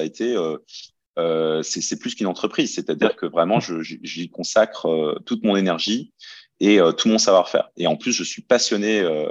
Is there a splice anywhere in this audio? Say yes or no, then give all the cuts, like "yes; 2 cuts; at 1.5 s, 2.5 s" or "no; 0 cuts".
no; 0 cuts